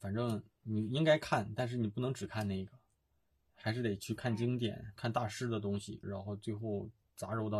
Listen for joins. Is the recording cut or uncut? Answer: cut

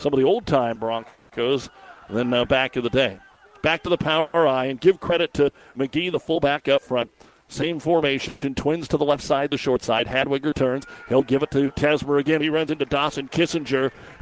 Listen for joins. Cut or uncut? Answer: cut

